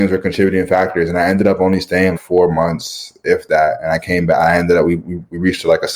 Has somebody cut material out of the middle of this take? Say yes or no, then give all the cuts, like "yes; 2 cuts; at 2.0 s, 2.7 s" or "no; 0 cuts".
yes; 1 cut; at 2.2 s